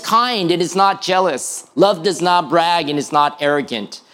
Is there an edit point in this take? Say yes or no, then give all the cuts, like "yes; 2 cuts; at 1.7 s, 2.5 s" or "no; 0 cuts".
no; 0 cuts